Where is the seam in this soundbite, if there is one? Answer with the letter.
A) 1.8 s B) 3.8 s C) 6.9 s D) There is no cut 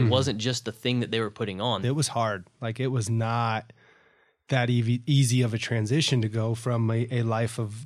A